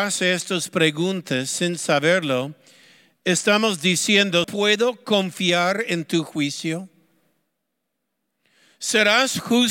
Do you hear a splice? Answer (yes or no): yes